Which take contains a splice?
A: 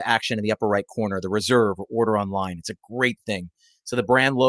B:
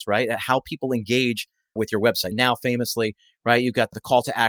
B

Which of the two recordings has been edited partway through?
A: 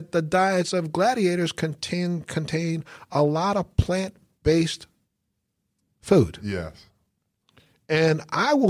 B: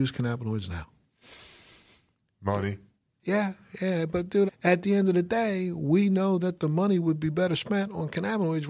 B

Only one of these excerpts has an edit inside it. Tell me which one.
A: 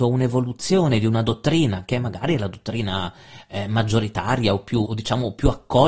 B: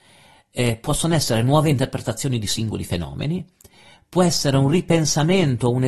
A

